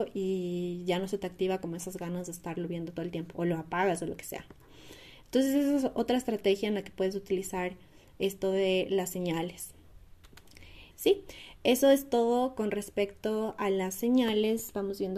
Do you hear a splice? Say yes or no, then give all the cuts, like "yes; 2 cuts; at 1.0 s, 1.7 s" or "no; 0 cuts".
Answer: yes; 1 cut; at 10.9 s